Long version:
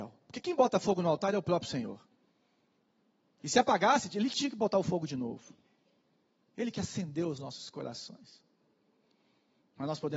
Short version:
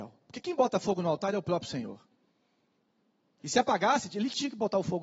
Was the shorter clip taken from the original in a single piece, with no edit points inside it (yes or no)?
yes